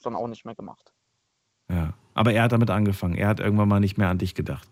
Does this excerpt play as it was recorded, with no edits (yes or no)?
yes